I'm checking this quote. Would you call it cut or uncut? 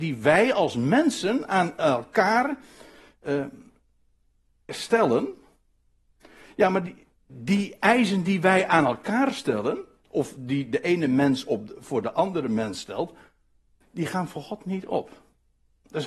uncut